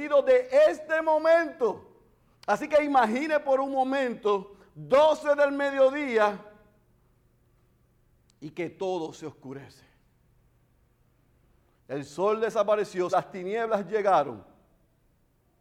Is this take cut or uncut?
cut